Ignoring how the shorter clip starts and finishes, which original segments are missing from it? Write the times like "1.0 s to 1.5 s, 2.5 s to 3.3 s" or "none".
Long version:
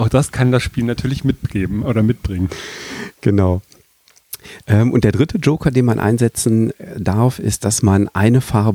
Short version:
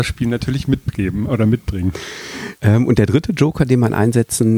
3.1 s to 4.6 s